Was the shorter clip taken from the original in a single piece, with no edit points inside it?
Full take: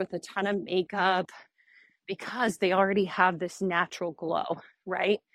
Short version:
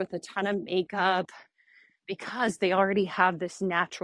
yes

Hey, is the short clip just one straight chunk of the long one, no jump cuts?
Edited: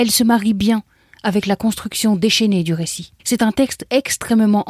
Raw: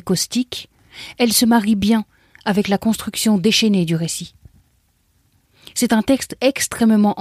no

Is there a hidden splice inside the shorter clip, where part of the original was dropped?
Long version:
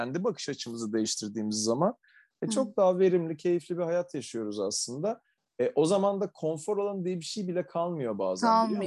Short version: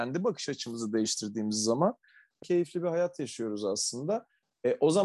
yes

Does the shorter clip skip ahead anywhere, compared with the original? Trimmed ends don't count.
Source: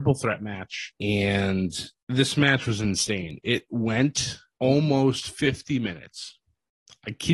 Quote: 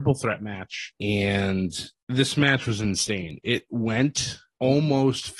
no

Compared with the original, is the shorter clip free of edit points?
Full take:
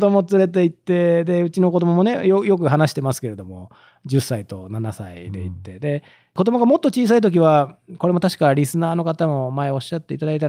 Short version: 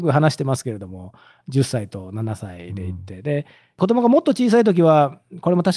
yes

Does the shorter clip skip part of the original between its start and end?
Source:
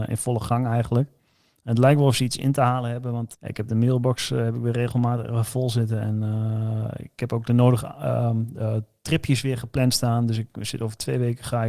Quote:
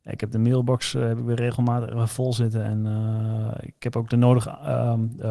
no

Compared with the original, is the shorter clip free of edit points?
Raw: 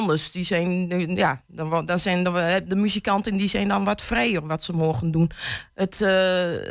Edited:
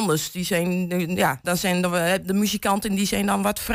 no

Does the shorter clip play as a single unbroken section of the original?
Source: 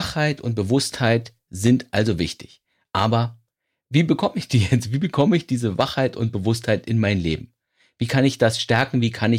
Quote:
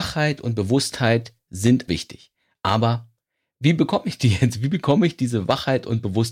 no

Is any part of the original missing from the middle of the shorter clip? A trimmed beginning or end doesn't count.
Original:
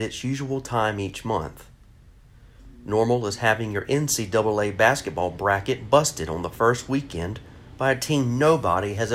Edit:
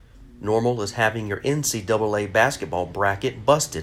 no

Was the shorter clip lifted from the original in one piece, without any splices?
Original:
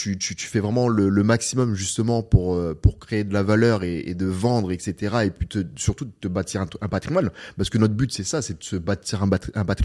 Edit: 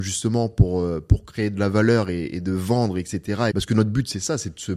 no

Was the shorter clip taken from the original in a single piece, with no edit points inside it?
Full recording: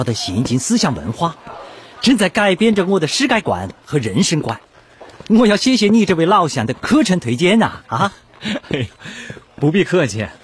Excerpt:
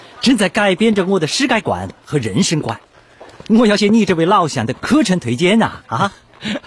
no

